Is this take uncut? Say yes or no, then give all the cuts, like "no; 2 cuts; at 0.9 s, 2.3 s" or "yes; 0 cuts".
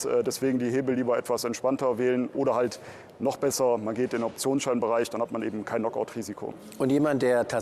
yes; 0 cuts